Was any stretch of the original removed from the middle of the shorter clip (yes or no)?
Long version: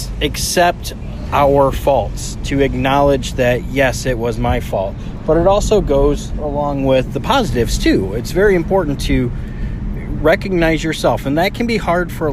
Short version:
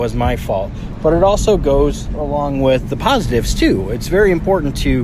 no